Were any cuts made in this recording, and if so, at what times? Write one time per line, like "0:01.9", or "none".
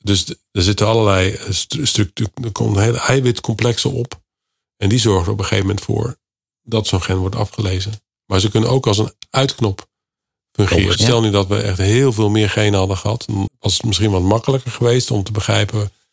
0:11.0
0:13.5